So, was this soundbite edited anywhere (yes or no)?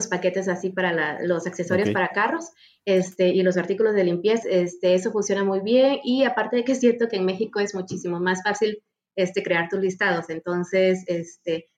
yes